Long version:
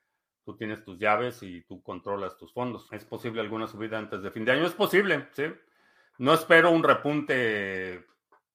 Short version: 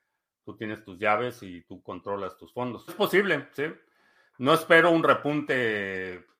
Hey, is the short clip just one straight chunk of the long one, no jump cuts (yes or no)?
no